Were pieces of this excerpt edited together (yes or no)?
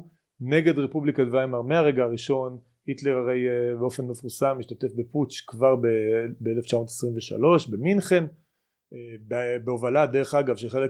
no